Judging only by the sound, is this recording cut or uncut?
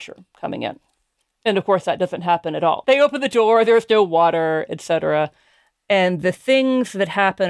cut